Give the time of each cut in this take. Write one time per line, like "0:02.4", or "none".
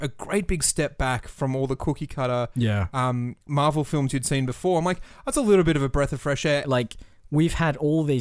0:03.4
0:06.6